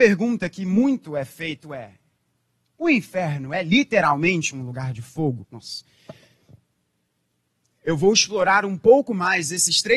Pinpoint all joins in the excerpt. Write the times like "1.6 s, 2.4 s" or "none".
5.4 s